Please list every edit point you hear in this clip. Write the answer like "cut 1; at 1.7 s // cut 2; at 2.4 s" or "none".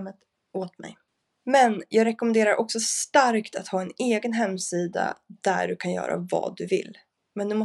none